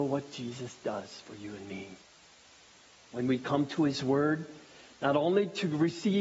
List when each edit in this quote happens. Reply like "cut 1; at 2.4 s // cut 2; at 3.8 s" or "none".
none